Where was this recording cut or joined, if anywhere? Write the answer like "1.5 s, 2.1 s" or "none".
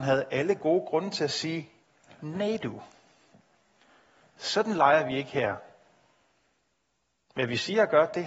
none

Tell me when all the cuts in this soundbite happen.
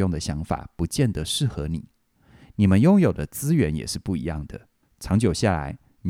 4.8 s

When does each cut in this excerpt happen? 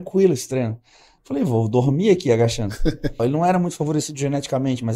1.2 s, 3.2 s

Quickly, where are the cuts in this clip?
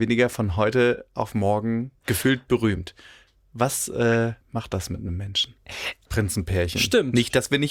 4.4 s, 6.1 s

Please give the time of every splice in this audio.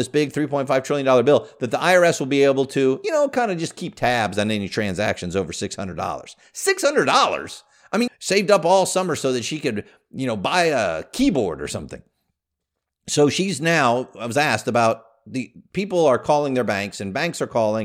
8.1 s

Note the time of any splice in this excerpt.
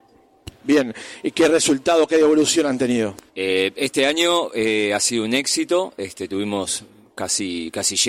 3.3 s

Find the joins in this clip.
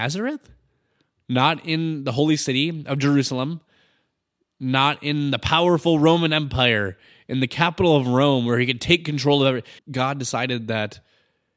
9.8 s

